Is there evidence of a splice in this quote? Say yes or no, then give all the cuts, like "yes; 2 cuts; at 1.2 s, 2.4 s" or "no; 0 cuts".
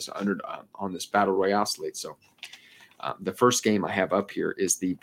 no; 0 cuts